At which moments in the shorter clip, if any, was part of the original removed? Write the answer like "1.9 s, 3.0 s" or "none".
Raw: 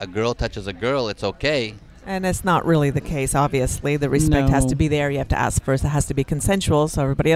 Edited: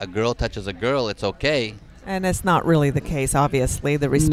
none